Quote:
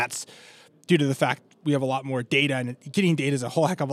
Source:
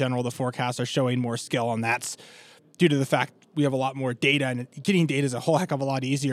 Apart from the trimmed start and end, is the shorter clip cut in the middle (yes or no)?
no